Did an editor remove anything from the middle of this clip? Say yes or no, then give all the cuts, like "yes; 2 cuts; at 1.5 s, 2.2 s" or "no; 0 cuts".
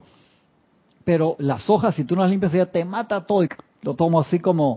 yes; 1 cut; at 3.5 s